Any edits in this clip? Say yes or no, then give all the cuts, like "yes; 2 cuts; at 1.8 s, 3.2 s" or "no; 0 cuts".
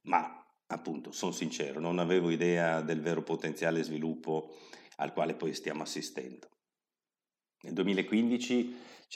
no; 0 cuts